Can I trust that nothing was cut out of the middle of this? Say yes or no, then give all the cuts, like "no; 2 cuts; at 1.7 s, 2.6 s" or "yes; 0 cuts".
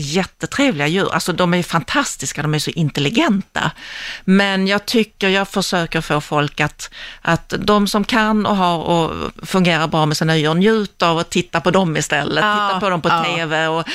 yes; 0 cuts